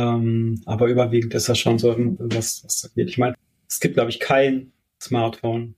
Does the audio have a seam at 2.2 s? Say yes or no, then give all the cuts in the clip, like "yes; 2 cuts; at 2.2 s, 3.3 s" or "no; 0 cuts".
yes; 1 cut; at 2.2 s